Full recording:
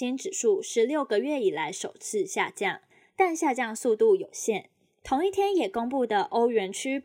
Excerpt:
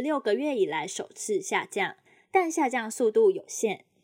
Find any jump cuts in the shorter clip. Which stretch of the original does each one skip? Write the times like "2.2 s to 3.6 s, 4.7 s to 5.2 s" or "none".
none

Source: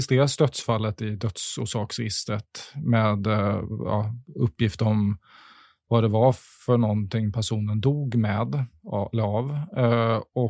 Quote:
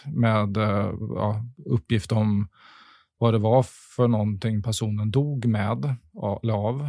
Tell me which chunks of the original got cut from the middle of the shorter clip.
none

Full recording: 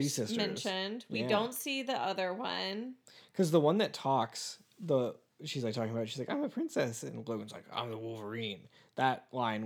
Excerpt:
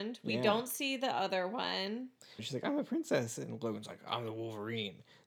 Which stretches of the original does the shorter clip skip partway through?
3.2 s to 6.0 s

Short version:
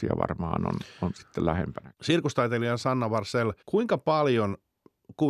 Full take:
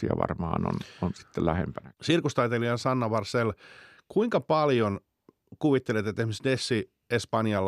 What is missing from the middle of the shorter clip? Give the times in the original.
3.6 s to 4.0 s

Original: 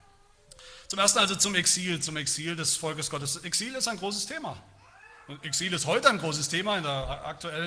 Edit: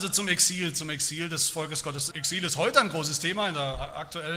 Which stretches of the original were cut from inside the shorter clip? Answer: 3.4 s to 5.4 s

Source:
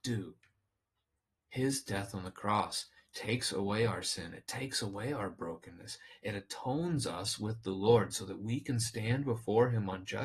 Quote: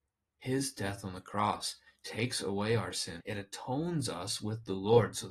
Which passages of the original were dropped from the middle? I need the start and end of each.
4.3 s to 6.2 s

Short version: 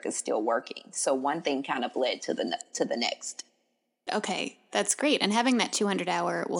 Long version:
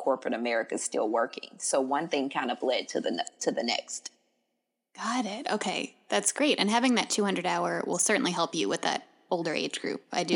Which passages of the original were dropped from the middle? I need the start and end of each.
4.7 s to 5.4 s

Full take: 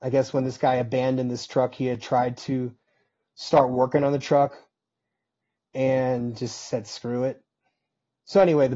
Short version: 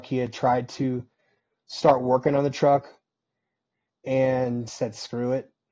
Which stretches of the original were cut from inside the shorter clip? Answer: 6.4 s to 6.6 s

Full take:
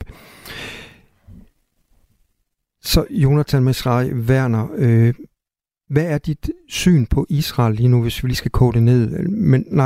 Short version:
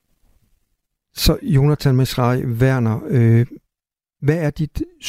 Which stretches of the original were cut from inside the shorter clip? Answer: none

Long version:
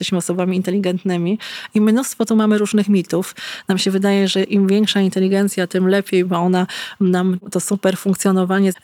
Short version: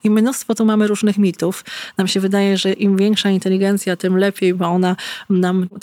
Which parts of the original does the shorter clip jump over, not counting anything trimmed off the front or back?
none

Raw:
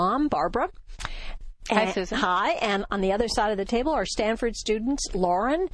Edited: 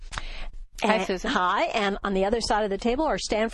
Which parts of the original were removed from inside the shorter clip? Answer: none

